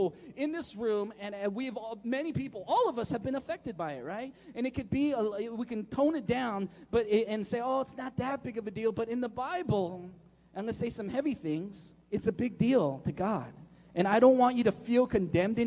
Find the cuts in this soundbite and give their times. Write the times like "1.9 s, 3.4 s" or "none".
12.0 s